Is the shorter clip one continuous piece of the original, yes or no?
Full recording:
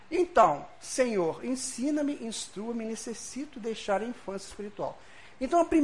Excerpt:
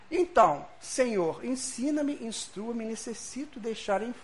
yes